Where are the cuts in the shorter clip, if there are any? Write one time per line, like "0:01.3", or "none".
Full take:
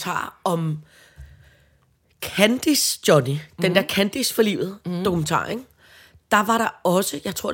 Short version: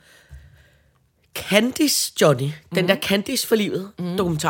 none